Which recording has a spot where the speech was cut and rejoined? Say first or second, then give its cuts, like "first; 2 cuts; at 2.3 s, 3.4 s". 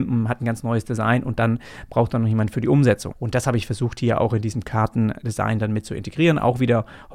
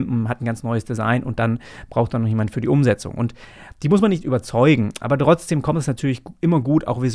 first; 1 cut; at 3.1 s